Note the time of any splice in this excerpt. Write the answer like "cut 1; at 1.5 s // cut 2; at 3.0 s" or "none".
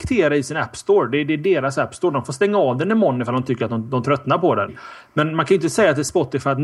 cut 1; at 4.7 s